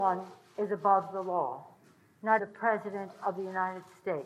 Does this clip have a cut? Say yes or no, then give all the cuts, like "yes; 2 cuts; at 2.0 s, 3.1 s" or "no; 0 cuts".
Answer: yes; 1 cut; at 2.4 s